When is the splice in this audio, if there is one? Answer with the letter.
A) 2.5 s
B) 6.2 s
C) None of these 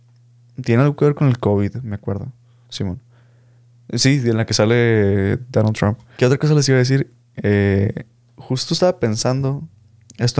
B